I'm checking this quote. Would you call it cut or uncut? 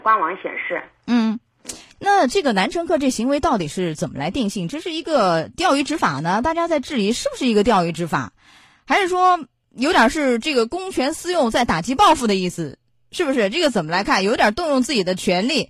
uncut